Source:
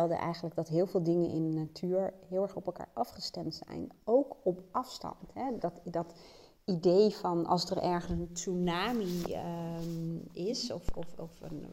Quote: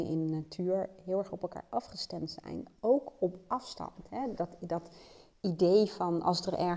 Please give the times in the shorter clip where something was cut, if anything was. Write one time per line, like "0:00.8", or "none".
none